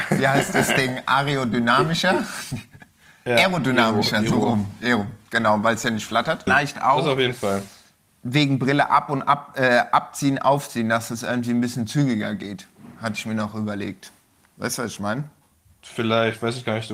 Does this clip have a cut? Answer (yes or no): yes